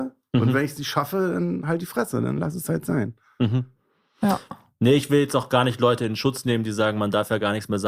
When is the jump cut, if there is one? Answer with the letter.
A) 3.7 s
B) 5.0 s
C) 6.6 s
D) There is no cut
D